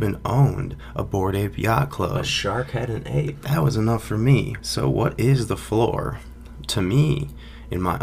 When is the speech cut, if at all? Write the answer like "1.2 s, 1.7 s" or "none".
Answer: 4.6 s